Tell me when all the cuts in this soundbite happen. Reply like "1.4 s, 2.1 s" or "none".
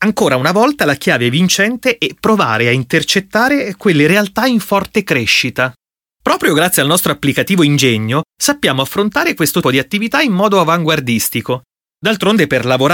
9.6 s, 11.8 s